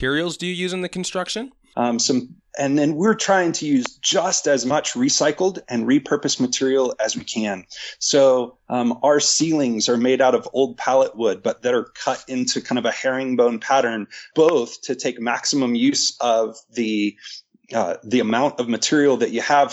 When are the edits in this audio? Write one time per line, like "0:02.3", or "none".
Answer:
0:01.7
0:14.3